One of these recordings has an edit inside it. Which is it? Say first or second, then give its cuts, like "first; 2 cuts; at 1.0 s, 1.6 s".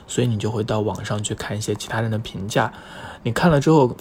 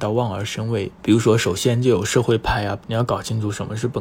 second; 1 cut; at 2.8 s